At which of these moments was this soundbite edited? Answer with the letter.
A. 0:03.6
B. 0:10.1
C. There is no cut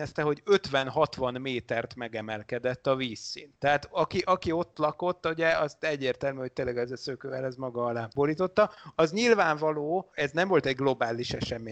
C